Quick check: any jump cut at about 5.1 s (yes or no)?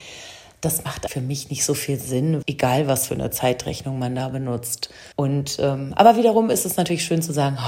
yes